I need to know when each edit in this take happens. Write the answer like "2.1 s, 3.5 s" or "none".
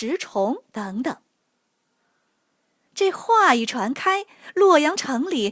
1.4 s